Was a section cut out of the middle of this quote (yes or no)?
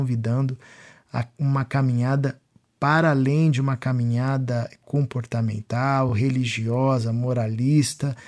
no